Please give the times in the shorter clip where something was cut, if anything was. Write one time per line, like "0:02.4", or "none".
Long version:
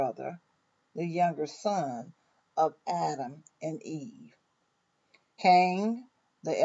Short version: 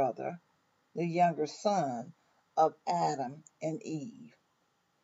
none